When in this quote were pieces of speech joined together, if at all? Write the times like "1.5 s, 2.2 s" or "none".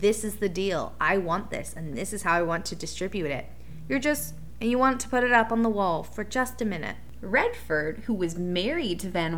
4.5 s, 7.2 s